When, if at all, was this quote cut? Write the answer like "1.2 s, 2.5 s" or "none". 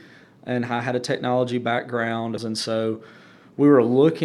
2.4 s